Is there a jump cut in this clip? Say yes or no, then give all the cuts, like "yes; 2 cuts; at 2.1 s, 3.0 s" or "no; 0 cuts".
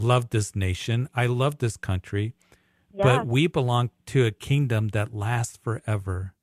no; 0 cuts